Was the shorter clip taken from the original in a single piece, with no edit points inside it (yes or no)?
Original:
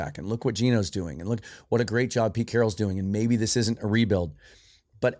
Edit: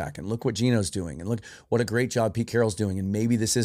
yes